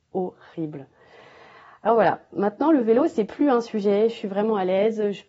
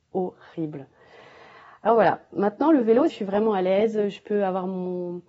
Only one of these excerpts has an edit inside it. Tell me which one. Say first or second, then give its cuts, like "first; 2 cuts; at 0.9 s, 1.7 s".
second; 1 cut; at 3.1 s